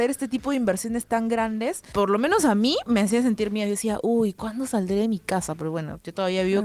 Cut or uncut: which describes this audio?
uncut